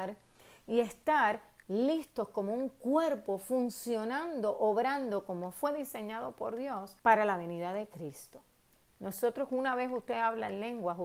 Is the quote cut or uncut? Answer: cut